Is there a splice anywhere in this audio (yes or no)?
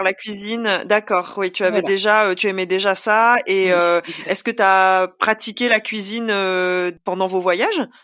no